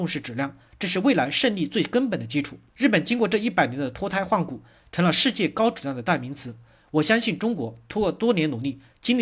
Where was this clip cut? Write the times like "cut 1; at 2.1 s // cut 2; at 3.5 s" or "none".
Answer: cut 1; at 2.7 s